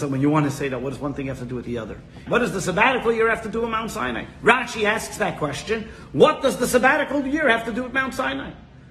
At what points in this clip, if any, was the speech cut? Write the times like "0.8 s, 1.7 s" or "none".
2.3 s